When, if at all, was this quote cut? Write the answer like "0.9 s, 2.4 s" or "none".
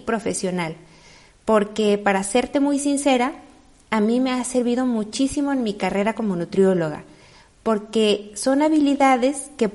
none

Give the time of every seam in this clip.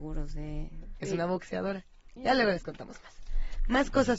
1.0 s, 2.2 s

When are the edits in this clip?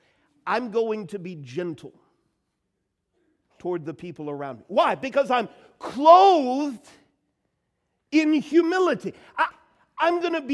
none

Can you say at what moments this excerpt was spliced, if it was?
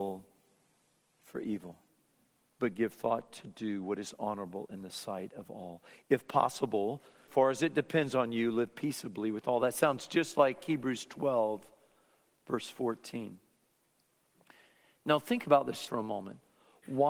7.3 s, 15.9 s

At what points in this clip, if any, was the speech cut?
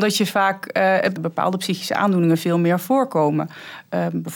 1.2 s

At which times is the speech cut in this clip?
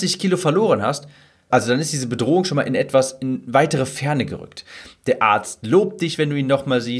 1.5 s

